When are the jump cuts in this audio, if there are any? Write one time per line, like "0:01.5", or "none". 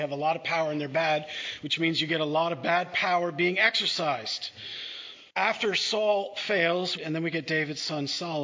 0:05.3
0:07.0

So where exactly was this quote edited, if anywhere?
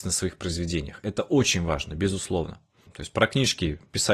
0:02.9

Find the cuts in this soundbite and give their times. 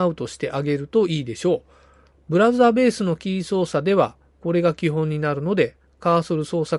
none

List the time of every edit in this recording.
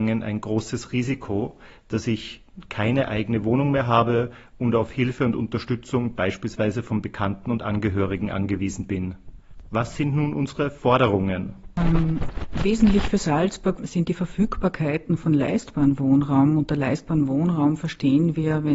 0:13.8

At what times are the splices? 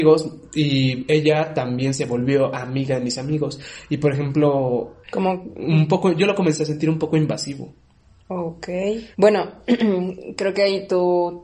0:09.1

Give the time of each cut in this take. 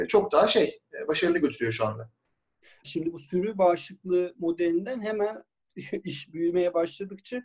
0:02.8

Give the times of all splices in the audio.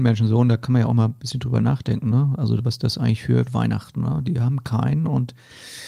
0:03.5

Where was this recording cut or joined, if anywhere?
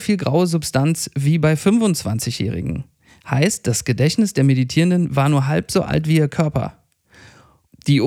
none

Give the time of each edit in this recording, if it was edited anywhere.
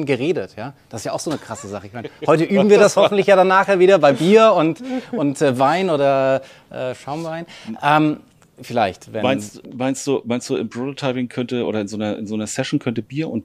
none

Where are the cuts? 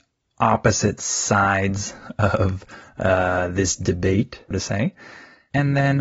0:04.5

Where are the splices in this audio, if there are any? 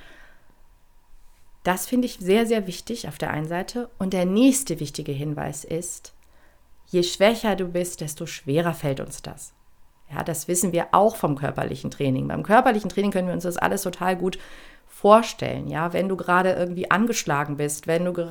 none

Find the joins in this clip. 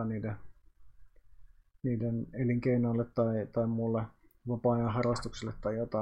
none

